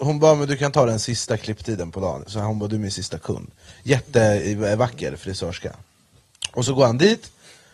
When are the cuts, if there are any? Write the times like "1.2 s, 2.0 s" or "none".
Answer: none